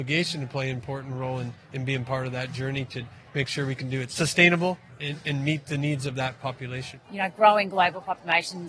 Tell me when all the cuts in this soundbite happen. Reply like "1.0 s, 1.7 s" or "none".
7.0 s